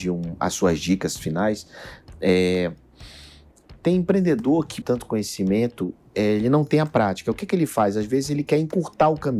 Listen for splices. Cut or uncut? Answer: cut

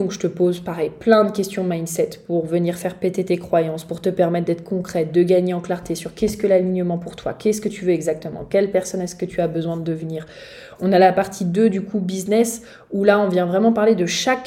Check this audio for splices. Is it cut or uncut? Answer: uncut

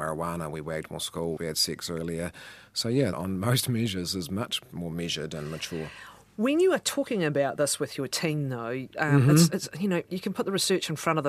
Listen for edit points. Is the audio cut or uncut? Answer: cut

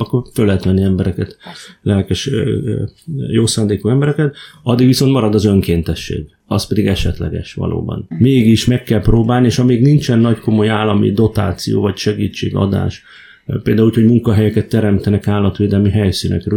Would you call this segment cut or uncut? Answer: cut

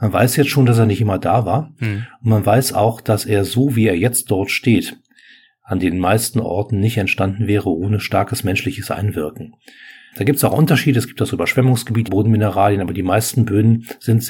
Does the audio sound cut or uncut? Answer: cut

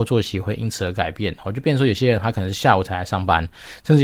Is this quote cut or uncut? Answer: uncut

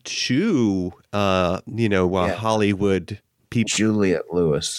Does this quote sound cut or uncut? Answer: cut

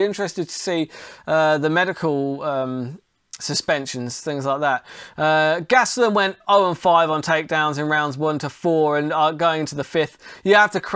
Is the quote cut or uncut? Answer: uncut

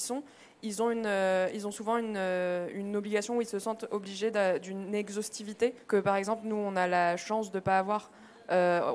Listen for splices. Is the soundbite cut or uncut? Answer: cut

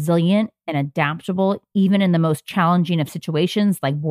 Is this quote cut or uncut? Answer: uncut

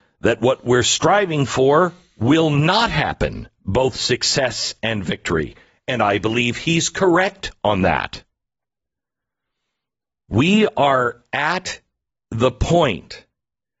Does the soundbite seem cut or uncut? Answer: uncut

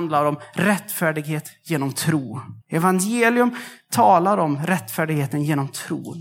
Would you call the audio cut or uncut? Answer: cut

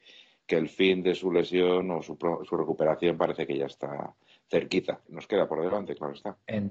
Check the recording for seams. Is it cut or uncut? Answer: cut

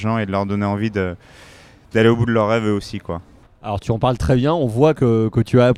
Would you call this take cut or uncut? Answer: uncut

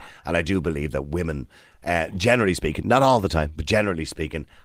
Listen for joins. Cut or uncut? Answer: uncut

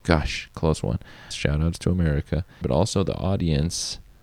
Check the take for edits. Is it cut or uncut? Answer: cut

